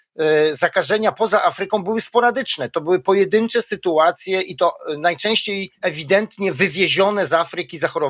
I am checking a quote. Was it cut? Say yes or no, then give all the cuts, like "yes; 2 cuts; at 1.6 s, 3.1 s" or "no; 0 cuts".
yes; 1 cut; at 5.8 s